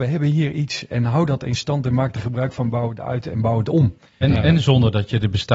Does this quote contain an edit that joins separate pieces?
yes; 1 cut; at 4.2 s

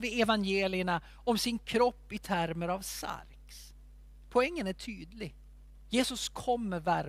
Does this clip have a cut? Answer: yes; 1 cut; at 5.8 s

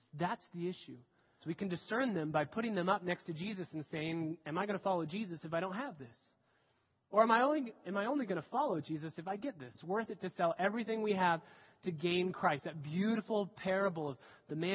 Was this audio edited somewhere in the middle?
yes; 2 cuts; at 1.4 s, 9.7 s

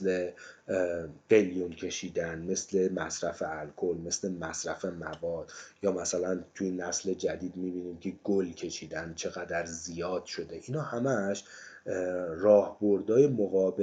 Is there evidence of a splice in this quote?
no; 0 cuts

